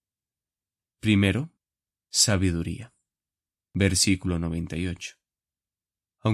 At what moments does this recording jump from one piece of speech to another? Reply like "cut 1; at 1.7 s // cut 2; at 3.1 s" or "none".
cut 1; at 0.9 s // cut 2; at 3.7 s